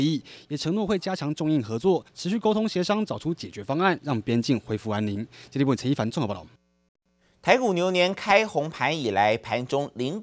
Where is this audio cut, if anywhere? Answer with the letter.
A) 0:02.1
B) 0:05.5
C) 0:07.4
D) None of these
D